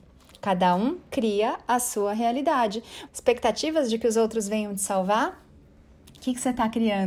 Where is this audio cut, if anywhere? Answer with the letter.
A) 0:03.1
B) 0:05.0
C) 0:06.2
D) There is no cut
A